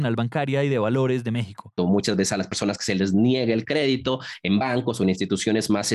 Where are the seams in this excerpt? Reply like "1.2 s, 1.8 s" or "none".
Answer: 1.8 s